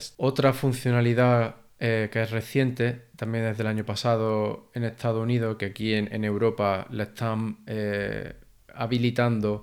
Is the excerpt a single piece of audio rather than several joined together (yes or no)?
yes